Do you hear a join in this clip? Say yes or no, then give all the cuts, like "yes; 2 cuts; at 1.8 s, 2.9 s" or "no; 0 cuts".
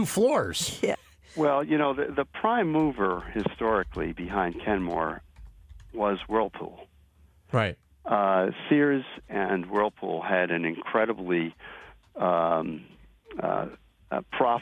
yes; 2 cuts; at 0.9 s, 9.3 s